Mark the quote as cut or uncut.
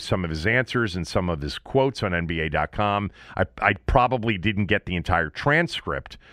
uncut